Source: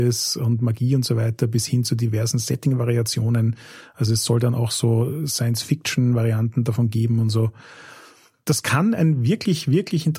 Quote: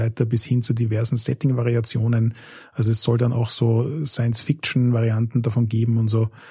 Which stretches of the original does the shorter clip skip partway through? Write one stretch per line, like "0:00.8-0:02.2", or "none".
none